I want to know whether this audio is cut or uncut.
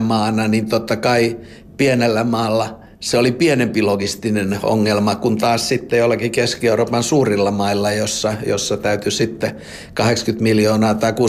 uncut